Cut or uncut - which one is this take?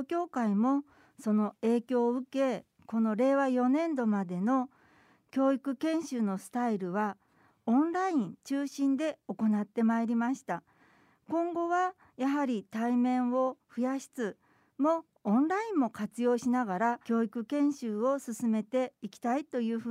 cut